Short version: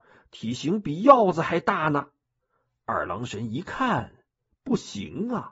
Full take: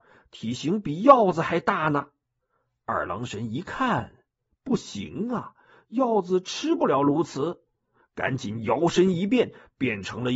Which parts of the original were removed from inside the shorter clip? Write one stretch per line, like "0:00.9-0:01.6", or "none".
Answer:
none

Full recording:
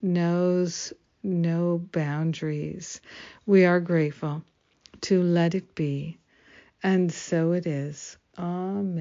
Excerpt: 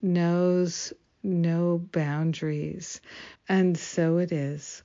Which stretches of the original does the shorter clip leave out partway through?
0:03.3-0:06.7

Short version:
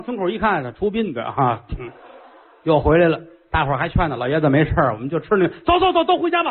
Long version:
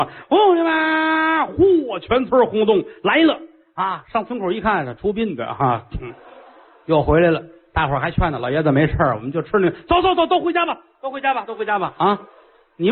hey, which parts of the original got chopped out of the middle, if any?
none

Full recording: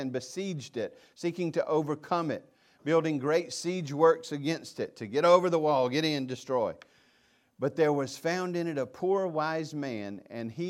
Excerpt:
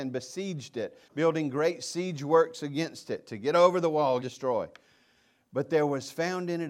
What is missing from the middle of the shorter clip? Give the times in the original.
0:01.1-0:02.8
0:05.9-0:06.3

